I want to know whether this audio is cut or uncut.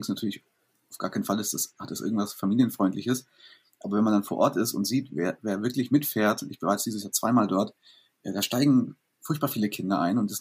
uncut